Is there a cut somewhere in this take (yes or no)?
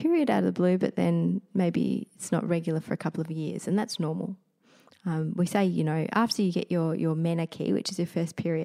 no